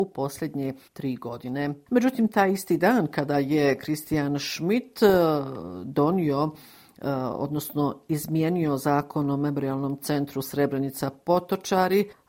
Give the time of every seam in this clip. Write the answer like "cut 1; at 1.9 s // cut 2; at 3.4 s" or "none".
none